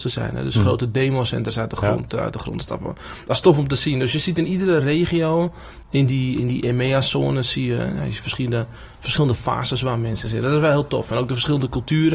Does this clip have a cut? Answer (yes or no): no